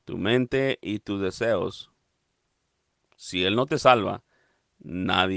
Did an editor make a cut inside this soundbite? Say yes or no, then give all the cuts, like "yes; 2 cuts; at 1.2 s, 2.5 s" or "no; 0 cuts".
no; 0 cuts